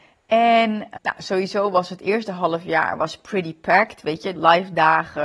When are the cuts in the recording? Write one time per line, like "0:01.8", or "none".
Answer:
0:01.0
0:04.4